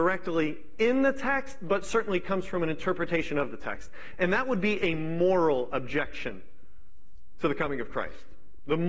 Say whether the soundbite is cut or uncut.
uncut